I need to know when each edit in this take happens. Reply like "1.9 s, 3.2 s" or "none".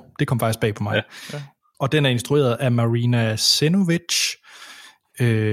1.7 s